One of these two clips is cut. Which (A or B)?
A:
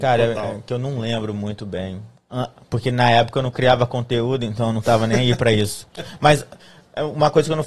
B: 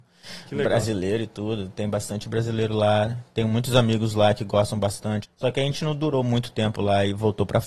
B